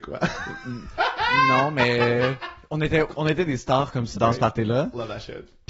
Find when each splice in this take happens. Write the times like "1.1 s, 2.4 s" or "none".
3.1 s, 4.1 s